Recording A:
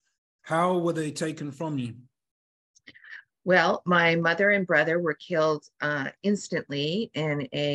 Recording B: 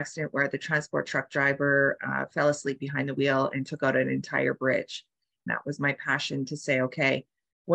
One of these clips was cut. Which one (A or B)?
B